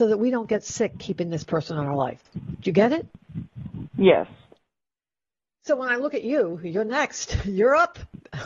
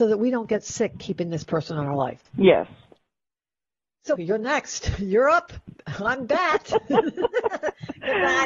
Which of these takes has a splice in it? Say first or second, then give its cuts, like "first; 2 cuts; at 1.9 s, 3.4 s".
second; 2 cuts; at 2.3 s, 4.2 s